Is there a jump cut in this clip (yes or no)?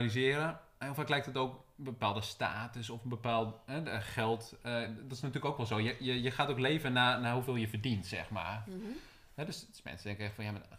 no